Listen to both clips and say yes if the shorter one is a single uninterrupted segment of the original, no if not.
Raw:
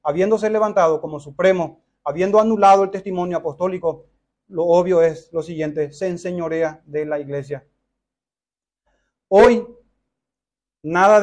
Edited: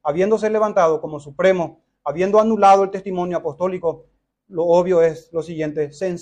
yes